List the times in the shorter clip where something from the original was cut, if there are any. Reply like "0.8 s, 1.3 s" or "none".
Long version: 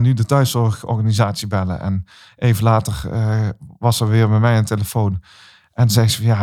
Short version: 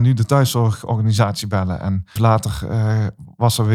2.2 s